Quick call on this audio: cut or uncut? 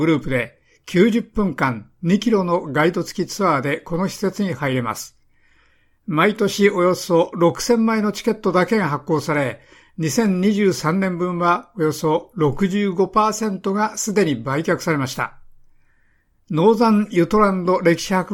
uncut